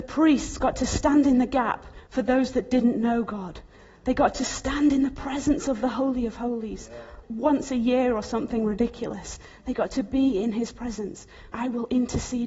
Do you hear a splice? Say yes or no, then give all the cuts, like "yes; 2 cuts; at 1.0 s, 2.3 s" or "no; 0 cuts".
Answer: yes; 2 cuts; at 7.2 s, 11.5 s